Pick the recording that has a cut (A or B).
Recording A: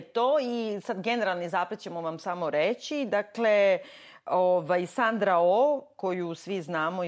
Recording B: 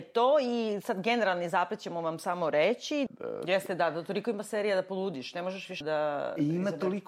B